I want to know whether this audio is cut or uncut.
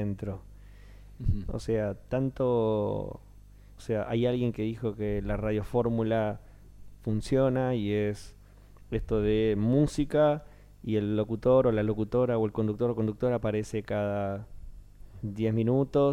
cut